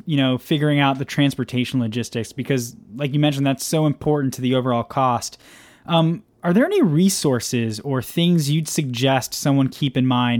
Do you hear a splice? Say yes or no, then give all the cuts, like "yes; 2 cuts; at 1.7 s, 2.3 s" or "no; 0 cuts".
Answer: no; 0 cuts